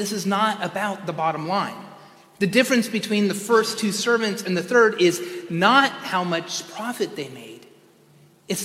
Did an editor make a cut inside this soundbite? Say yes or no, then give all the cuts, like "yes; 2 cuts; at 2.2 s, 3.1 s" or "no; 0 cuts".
no; 0 cuts